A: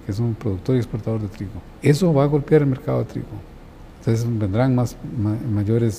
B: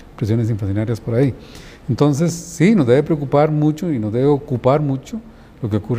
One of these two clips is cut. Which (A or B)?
A